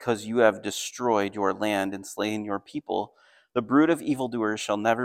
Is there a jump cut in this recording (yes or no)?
no